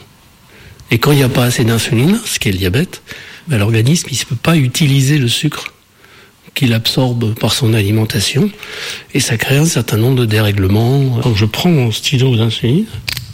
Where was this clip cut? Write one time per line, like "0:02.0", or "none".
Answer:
0:11.2

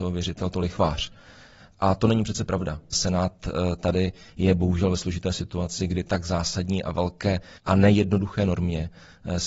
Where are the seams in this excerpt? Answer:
0:02.9
0:07.6

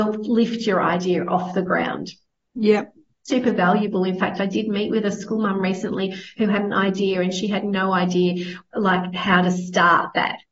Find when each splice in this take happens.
none

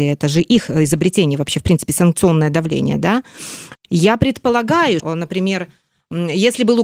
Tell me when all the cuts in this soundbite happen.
0:03.7
0:05.0

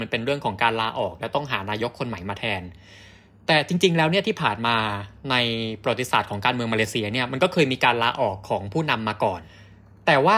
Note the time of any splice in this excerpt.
none

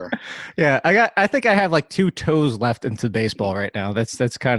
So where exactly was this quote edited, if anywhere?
none

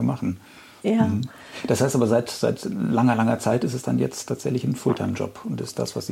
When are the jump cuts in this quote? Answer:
none

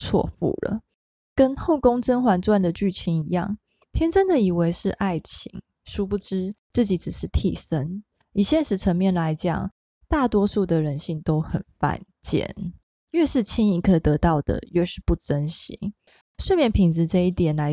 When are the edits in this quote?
0:16.2

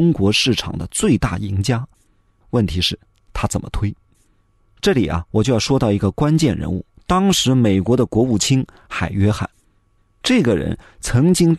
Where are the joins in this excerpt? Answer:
0:02.4

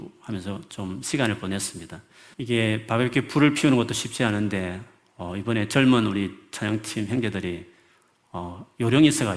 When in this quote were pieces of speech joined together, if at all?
0:02.3

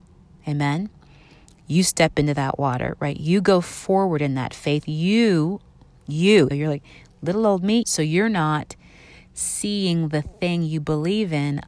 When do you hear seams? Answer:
0:06.5
0:07.8

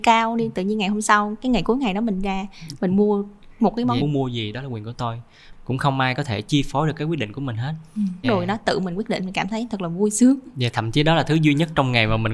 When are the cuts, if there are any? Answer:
0:04.0
0:08.2

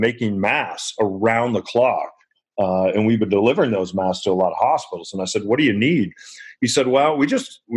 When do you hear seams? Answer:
none

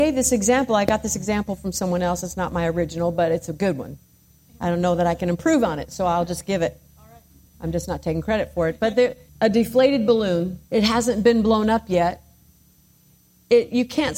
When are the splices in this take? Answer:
0:09.3
0:10.6

